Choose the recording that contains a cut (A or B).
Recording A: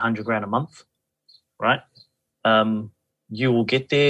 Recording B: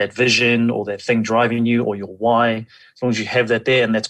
A